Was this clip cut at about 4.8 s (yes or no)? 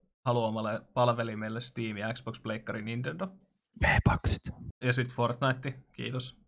yes